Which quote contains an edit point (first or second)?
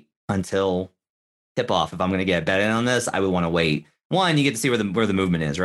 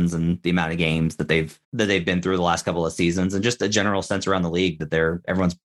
second